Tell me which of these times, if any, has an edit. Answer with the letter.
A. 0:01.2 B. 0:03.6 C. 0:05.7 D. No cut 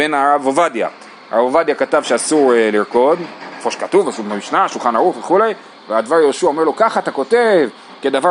D